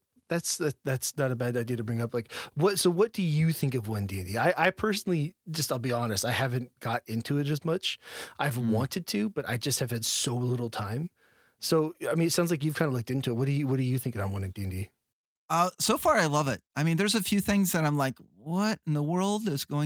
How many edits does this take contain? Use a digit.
0